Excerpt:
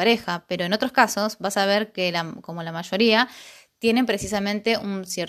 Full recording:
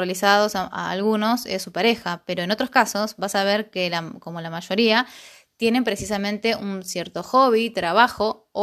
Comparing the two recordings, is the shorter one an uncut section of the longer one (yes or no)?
yes